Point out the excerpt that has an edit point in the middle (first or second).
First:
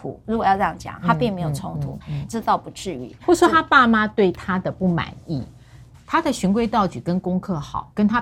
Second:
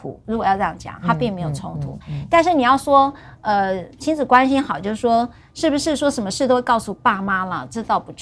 first